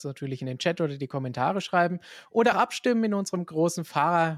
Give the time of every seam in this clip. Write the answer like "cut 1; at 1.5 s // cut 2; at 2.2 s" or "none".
cut 1; at 2.5 s